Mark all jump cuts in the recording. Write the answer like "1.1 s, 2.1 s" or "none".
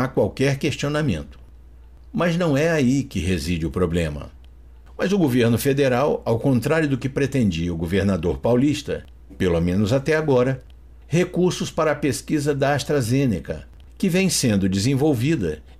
4.9 s, 9.3 s